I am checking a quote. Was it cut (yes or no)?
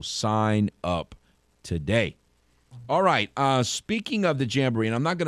no